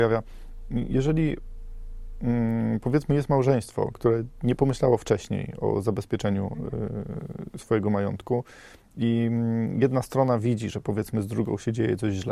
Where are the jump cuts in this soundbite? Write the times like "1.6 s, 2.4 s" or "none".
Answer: none